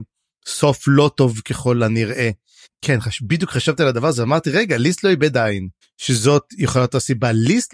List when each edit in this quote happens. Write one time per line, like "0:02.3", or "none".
0:02.6
0:05.8